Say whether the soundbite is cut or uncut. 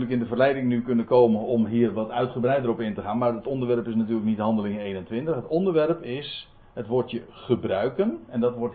uncut